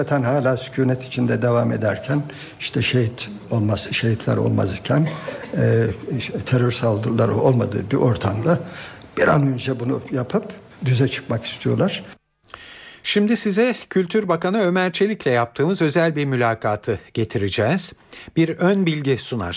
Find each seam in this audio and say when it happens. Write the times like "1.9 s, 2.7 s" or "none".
none